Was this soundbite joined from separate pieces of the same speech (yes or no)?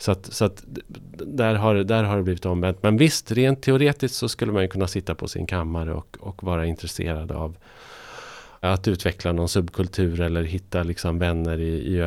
yes